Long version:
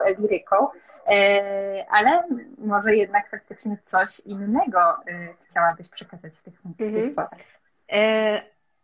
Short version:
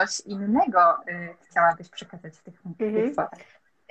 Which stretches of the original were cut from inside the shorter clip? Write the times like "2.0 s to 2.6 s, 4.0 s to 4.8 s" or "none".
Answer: none